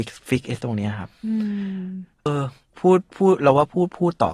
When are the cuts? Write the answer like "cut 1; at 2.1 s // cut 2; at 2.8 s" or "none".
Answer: cut 1; at 2.3 s